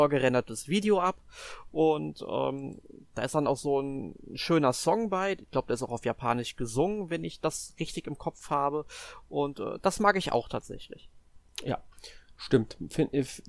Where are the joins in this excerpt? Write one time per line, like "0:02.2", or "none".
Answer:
none